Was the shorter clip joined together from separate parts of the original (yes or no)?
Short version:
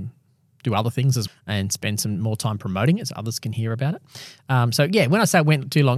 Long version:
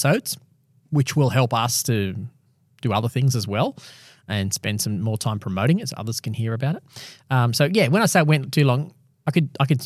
yes